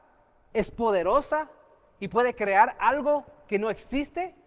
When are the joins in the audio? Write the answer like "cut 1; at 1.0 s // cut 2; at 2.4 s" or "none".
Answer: none